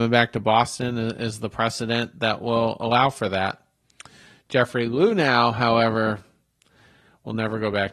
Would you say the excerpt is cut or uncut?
uncut